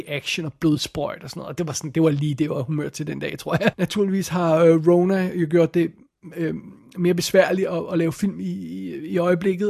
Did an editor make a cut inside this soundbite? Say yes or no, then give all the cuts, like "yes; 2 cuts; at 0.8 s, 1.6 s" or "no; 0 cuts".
yes; 1 cut; at 3.7 s